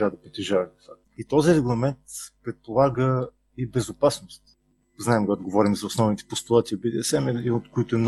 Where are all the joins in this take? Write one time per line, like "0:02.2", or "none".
0:01.0